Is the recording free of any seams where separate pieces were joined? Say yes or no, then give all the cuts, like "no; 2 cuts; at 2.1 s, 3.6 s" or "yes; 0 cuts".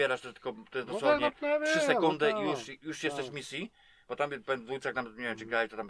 yes; 0 cuts